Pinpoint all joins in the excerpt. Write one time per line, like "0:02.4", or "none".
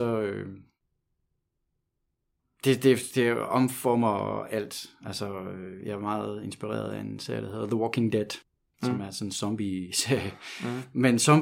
0:05.8

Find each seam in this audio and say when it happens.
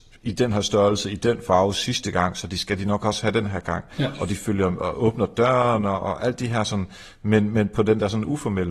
none

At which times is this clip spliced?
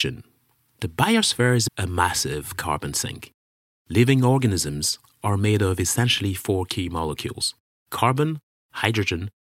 0:01.7

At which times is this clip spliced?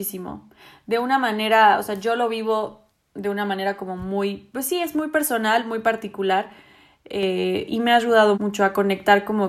0:08.3

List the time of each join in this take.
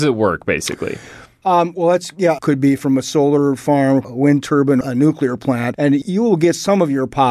0:02.4
0:04.8

